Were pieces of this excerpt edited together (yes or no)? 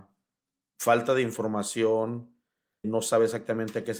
yes